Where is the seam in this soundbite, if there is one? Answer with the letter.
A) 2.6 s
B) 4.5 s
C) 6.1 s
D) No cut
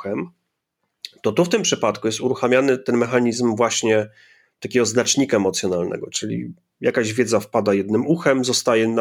C